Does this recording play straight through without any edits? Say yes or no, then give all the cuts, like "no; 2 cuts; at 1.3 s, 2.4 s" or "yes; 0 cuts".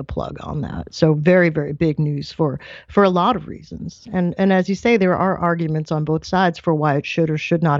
yes; 0 cuts